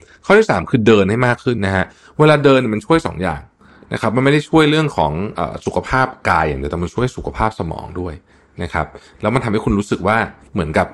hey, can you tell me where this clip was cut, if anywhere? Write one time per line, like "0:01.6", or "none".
0:01.6

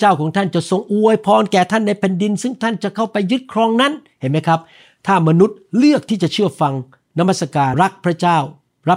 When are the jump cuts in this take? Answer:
0:07.7

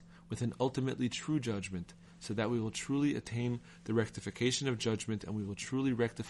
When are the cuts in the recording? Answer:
none

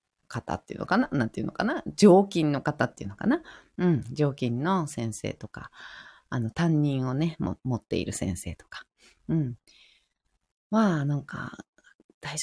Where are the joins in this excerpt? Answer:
none

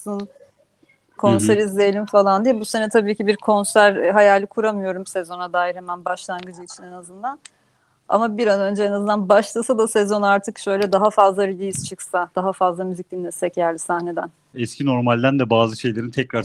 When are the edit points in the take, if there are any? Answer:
0:01.2
0:14.5

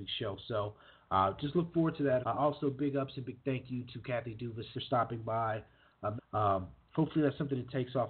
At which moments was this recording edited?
0:02.2
0:04.7
0:06.2

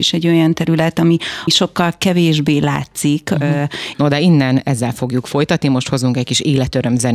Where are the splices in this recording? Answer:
0:01.5
0:03.9

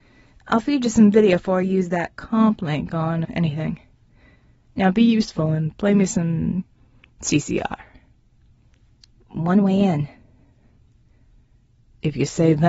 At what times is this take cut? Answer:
0:03.2
0:09.1

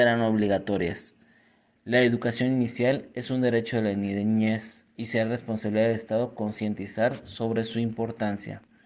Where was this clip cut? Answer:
0:01.8
0:04.9

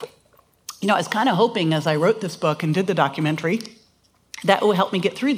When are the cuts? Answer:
none

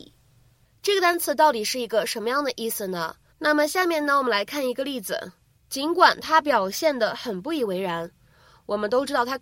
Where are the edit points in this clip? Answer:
0:03.3
0:05.5

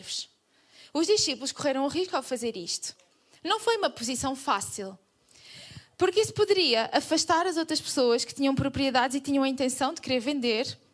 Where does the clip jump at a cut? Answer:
none

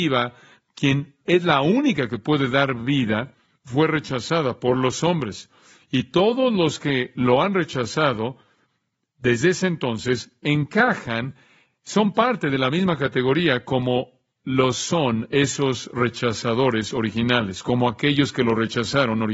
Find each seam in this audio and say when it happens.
none

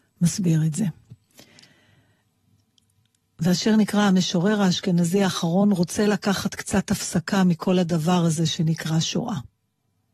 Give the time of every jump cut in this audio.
none

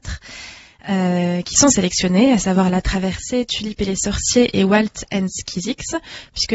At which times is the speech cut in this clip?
none

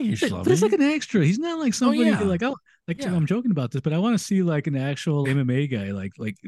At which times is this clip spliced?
0:03.0
0:05.2

